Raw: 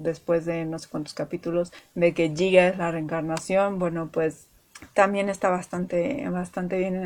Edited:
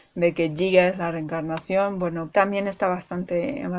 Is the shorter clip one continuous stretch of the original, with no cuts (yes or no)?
no